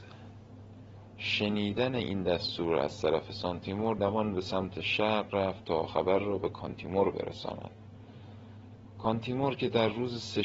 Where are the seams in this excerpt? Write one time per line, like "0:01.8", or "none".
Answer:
0:04.0